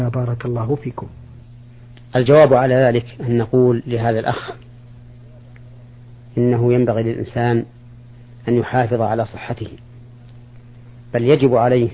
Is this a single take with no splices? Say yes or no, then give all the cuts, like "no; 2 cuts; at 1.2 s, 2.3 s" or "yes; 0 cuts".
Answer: yes; 0 cuts